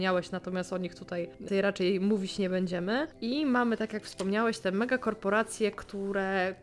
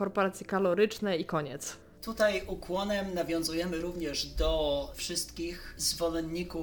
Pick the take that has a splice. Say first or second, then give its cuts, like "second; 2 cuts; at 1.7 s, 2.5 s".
first; 1 cut; at 1.5 s